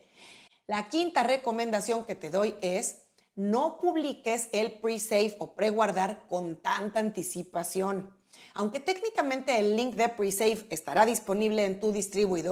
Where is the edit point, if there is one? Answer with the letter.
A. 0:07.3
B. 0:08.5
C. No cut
C